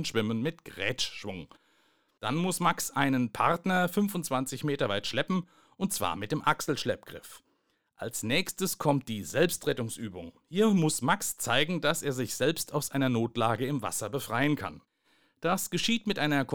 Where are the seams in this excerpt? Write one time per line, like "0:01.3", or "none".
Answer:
none